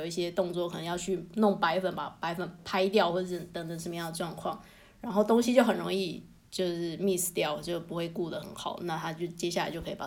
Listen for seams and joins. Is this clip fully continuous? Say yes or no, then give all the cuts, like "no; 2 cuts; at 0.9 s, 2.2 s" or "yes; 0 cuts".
yes; 0 cuts